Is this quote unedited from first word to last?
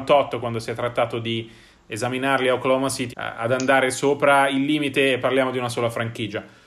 no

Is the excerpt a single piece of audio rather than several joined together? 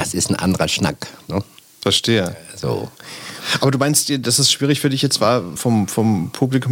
no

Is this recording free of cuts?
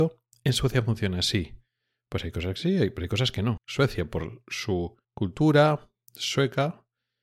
no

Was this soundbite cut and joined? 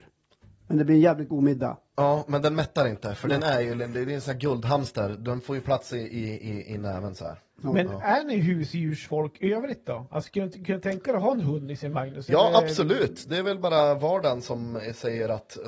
no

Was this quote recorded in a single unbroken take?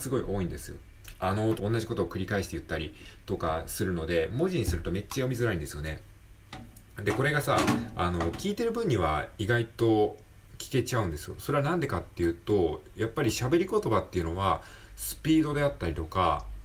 no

